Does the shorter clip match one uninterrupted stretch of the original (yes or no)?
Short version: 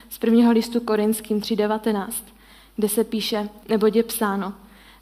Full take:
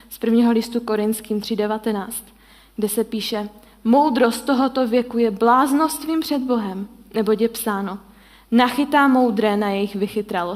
no